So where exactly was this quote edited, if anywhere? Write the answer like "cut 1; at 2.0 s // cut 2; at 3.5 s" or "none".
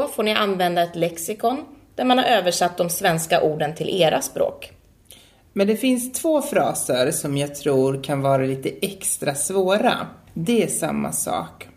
cut 1; at 10.3 s

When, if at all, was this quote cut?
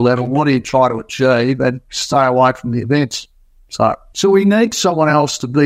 cut 1; at 4.1 s

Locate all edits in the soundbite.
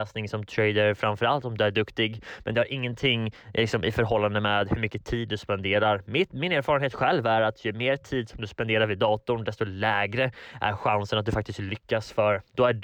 none

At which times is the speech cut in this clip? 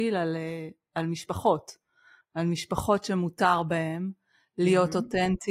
none

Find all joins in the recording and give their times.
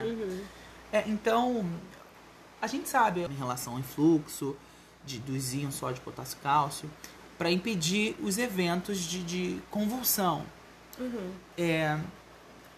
cut 1; at 3.3 s

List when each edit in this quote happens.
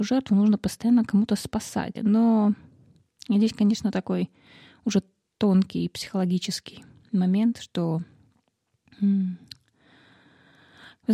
cut 1; at 2.0 s

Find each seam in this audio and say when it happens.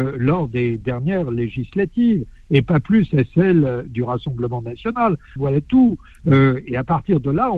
cut 1; at 5.4 s

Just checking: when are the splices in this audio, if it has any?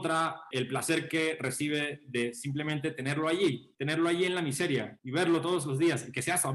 none

